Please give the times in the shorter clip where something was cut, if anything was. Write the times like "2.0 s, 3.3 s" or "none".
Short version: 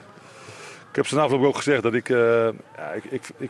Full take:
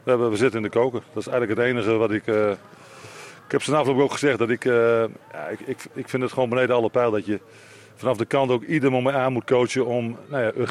none